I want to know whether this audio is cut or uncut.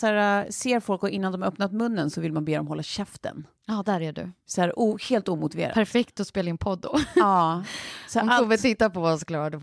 uncut